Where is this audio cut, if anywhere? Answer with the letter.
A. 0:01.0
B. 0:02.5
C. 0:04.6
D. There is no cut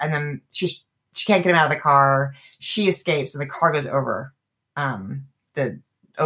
D